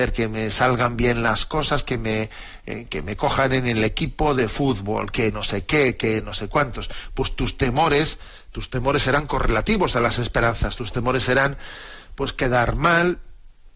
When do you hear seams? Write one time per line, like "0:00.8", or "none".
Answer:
none

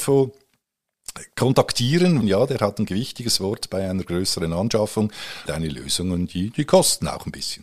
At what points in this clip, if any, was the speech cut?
0:02.2
0:05.4

